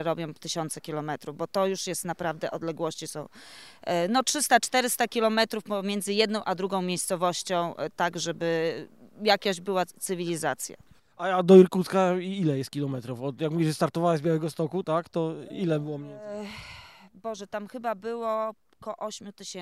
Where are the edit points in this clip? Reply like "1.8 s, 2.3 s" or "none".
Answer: none

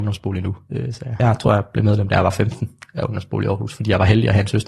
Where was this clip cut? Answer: 1.2 s

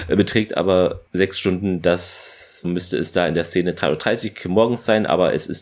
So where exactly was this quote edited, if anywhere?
2.6 s

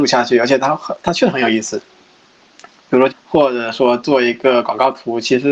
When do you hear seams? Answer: 3.1 s

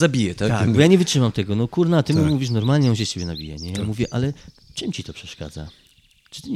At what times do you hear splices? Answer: none

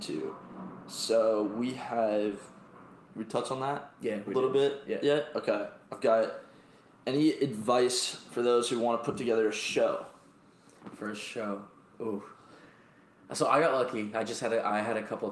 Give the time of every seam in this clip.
3.1 s

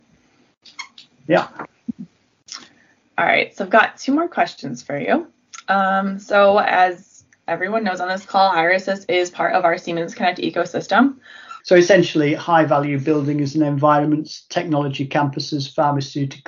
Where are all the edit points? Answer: 11.6 s

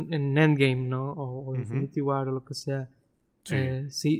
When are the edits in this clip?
none

